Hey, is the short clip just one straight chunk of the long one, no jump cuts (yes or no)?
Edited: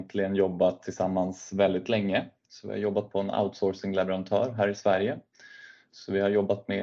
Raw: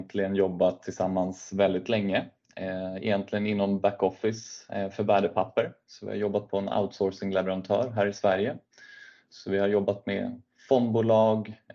no